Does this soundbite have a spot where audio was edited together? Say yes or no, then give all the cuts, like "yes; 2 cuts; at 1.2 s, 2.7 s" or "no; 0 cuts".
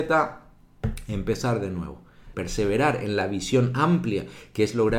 yes; 1 cut; at 2.3 s